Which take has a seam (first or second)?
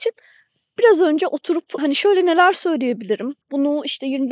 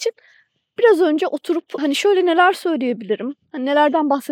first